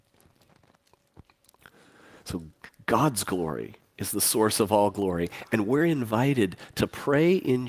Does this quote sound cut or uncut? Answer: uncut